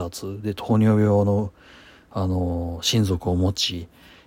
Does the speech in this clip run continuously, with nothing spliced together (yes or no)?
yes